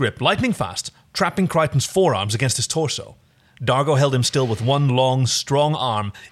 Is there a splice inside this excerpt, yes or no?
no